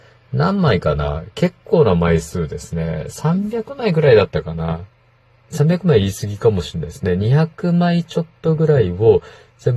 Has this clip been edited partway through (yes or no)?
no